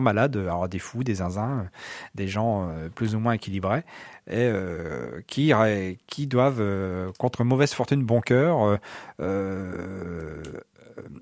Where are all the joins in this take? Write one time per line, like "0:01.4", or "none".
none